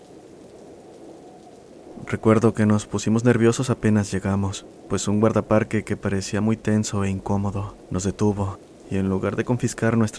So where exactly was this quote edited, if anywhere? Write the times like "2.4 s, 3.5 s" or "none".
none